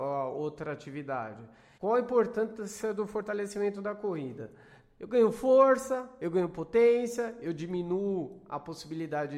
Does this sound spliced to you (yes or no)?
yes